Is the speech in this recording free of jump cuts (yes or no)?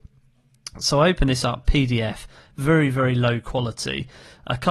no